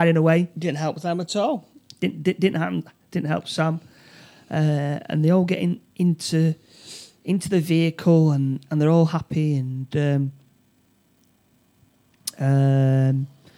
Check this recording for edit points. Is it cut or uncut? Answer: uncut